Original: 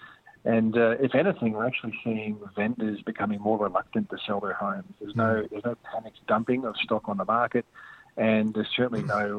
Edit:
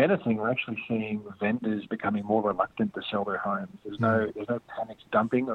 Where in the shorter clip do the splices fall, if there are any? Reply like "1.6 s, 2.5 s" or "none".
none